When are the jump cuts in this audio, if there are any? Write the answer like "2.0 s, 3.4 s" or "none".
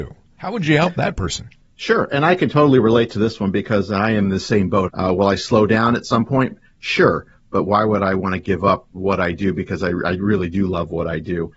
4.9 s

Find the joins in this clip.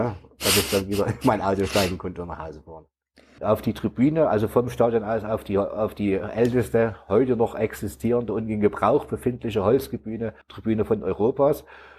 3.4 s, 10.4 s

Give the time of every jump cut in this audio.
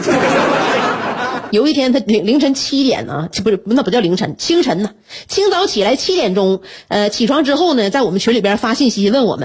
1.5 s

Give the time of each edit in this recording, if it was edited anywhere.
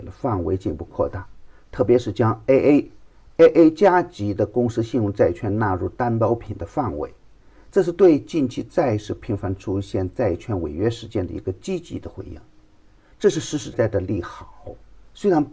13.7 s

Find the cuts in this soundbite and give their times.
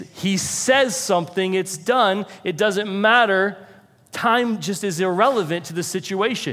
none

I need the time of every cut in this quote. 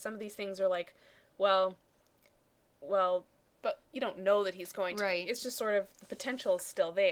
3.6 s

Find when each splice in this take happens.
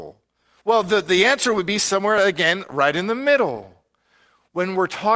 none

